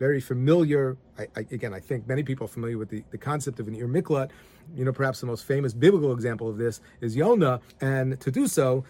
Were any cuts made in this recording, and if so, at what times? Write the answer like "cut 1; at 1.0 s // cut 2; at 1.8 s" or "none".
cut 1; at 4.7 s // cut 2; at 7.7 s